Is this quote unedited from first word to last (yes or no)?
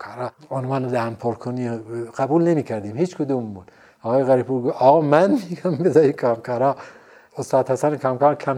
yes